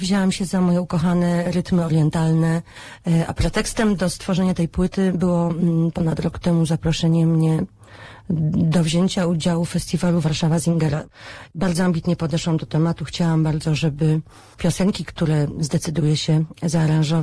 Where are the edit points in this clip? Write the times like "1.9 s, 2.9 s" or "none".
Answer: none